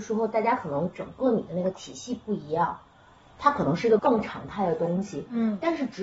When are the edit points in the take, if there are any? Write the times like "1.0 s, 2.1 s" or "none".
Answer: 4.0 s